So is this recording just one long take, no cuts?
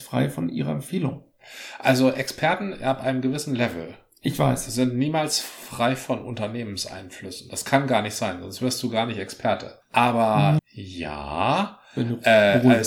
no; 1 cut; at 10.6 s

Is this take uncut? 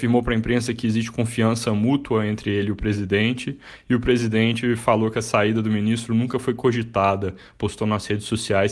yes; 0 cuts

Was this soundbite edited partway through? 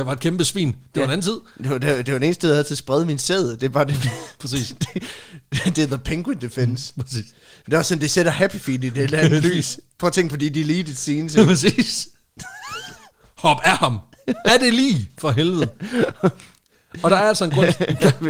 no; 0 cuts

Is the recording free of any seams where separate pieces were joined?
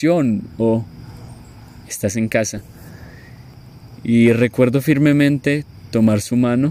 yes; 0 cuts

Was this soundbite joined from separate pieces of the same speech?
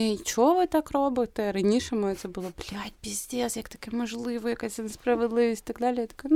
no; 0 cuts

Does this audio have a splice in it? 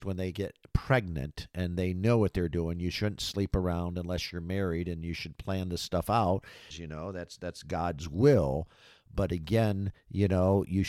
yes; 1 cut; at 6.7 s

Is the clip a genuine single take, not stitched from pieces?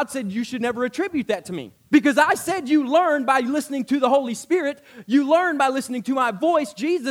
yes; 0 cuts

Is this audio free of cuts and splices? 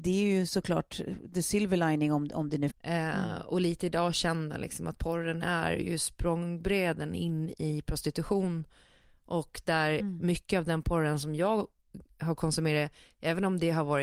no; 1 cut; at 2.7 s

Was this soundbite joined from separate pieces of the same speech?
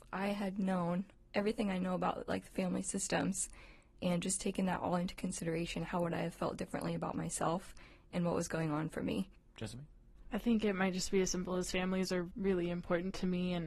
no; 0 cuts

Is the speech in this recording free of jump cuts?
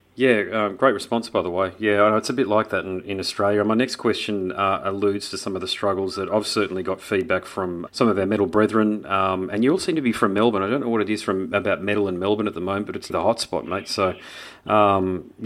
no; 2 cuts; at 7.9 s, 13.1 s

